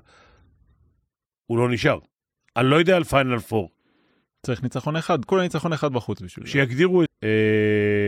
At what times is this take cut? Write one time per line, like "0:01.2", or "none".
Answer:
0:05.2
0:07.1